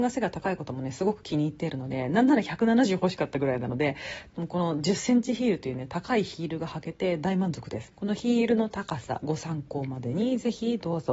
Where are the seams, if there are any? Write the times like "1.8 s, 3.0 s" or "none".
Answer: 7.9 s